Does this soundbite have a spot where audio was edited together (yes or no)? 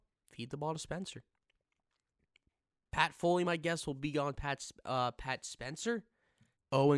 no